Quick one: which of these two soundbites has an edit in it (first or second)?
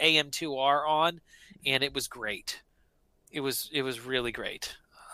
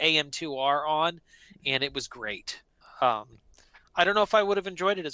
second